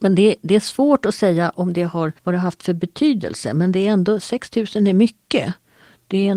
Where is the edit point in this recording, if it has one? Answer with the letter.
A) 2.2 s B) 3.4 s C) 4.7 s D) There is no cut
A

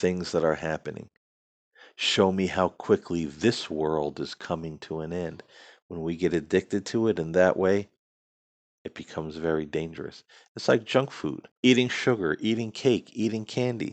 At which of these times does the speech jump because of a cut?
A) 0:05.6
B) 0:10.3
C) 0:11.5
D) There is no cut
C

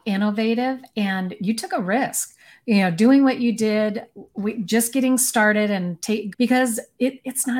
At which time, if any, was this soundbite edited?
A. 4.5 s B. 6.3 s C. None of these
B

